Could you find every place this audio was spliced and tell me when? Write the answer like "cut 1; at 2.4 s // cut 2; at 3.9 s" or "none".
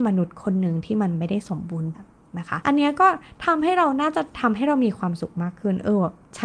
cut 1; at 1.9 s